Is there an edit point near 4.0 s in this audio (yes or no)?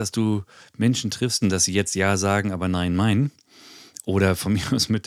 no